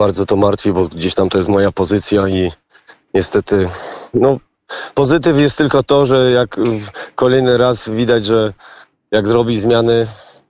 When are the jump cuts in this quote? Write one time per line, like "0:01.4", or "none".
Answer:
none